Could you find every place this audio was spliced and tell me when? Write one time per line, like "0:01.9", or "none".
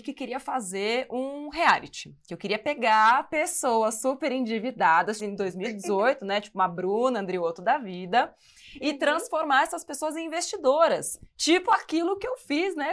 0:05.2